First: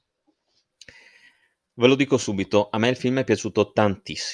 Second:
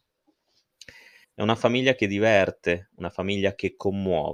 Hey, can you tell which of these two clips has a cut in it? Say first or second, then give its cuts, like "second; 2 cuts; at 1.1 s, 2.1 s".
second; 1 cut; at 1.2 s